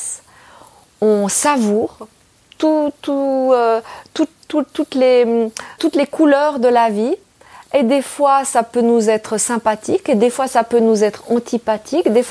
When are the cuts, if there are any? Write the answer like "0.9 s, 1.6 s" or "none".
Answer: 5.8 s